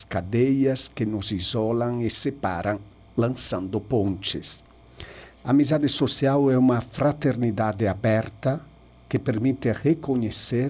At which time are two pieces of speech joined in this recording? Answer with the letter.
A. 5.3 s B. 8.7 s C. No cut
A